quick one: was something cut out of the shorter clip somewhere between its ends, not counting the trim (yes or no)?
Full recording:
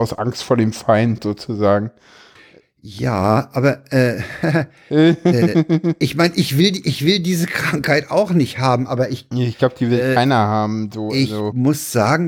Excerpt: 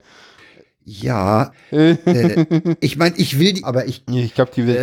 yes